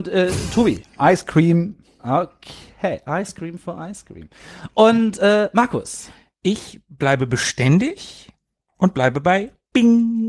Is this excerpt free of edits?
yes; 0 cuts

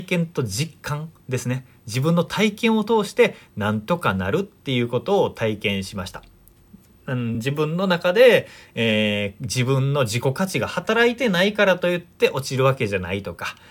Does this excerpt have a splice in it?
no; 0 cuts

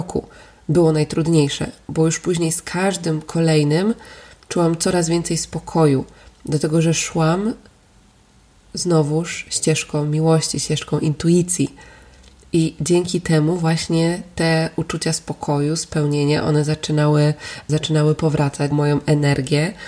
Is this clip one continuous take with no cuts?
no; 2 cuts; at 17.7 s, 18.7 s

